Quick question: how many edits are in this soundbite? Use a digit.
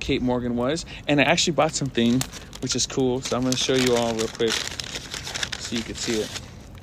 0